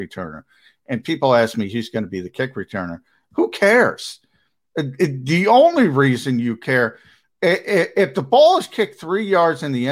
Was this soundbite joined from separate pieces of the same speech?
yes; 1 cut; at 3.2 s

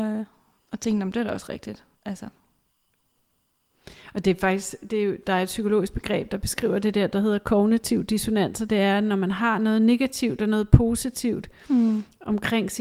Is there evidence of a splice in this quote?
no; 0 cuts

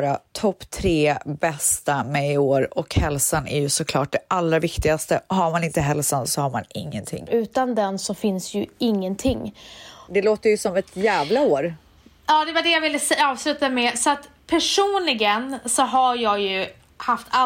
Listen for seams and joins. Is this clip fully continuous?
no; 2 cuts; at 7.3 s, 10.1 s

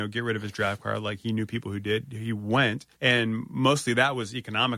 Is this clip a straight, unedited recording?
no; 1 cut; at 2.9 s

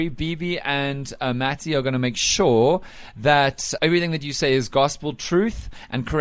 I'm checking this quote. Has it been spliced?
yes; 1 cut; at 3.8 s

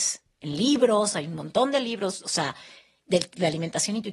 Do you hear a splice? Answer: no; 0 cuts

